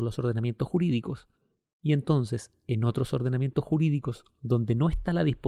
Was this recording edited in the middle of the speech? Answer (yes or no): no